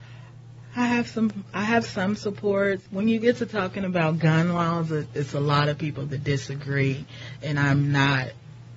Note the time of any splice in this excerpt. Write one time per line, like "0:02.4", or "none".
none